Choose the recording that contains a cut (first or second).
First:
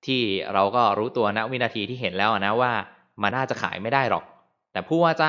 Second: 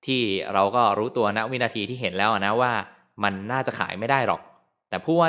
first